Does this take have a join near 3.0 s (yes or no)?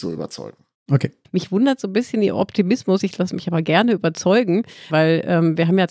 no